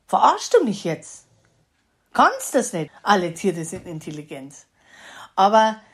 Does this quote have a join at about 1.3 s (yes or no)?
no